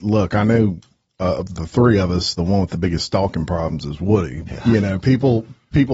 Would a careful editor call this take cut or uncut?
cut